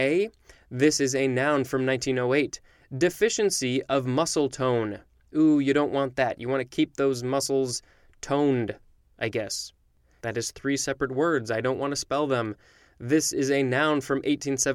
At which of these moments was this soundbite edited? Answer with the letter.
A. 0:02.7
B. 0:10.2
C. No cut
B